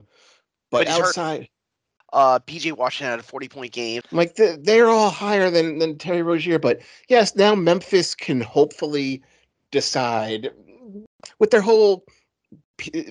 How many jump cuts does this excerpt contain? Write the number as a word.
two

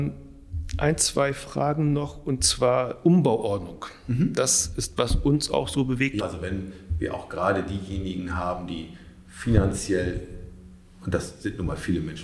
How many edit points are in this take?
one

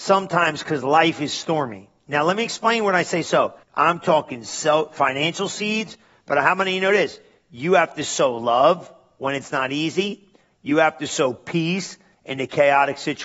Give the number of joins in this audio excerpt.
one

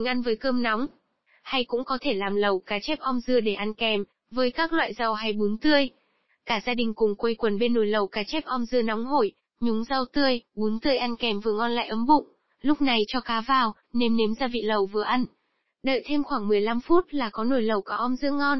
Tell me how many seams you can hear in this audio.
two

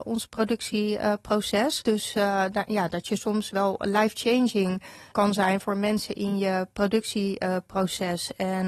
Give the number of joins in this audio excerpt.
two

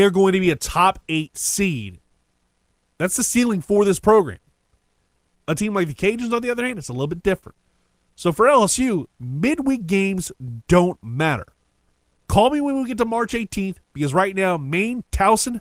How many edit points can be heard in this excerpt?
one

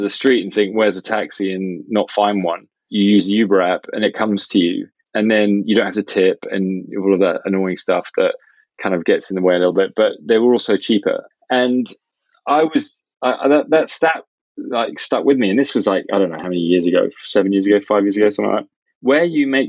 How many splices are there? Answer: zero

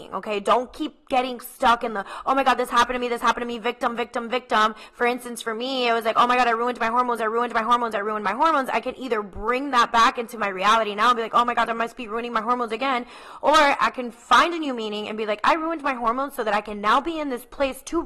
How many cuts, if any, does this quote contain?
one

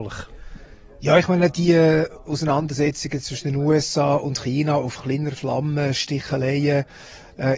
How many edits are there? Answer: zero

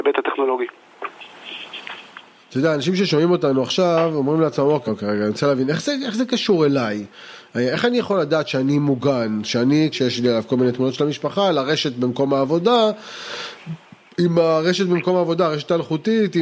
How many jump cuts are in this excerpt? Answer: two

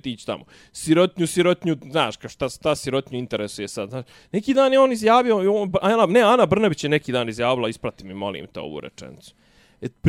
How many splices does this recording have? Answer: zero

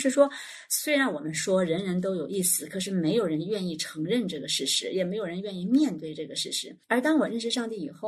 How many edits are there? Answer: one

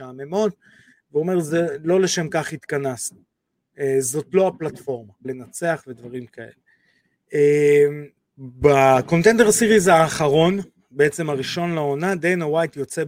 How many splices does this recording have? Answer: two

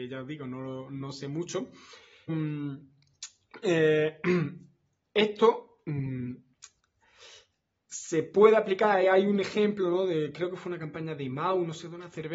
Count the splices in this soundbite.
one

